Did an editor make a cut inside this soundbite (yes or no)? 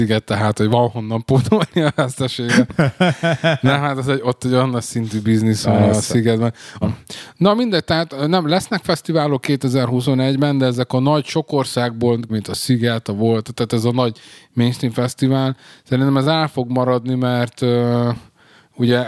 yes